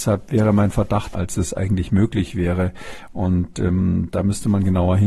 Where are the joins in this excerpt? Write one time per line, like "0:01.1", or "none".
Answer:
0:01.1